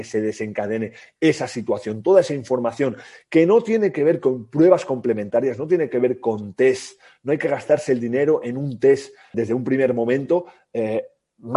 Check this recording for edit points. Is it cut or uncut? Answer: cut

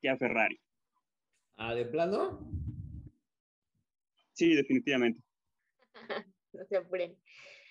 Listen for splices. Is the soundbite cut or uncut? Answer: cut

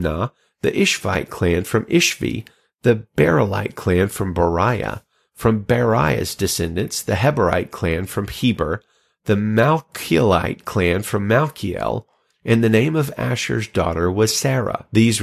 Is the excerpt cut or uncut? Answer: uncut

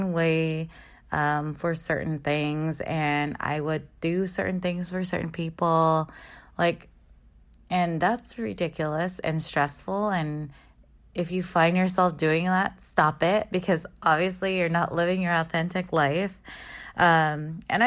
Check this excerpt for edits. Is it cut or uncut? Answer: uncut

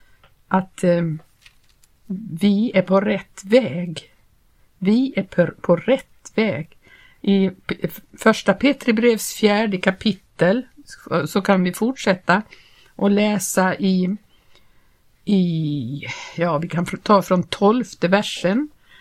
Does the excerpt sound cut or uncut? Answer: uncut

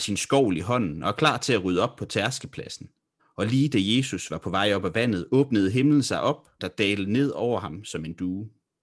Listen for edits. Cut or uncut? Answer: cut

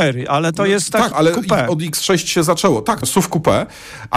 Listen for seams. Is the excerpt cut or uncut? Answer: cut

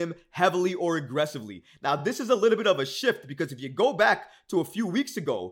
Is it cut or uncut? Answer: uncut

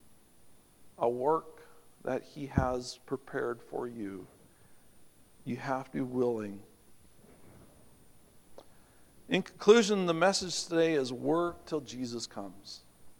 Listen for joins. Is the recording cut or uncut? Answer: uncut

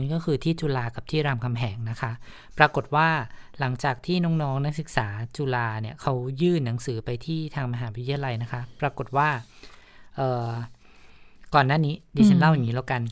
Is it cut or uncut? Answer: uncut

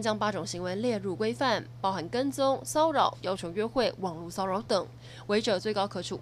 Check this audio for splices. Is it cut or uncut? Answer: uncut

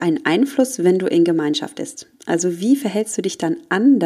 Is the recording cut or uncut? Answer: uncut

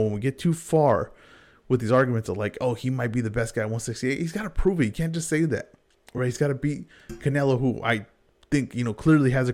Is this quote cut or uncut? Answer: uncut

